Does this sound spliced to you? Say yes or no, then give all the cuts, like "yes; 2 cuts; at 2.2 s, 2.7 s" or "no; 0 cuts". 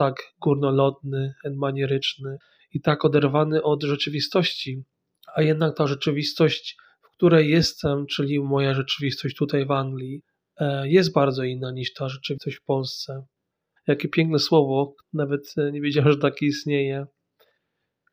yes; 2 cuts; at 13.8 s, 15.0 s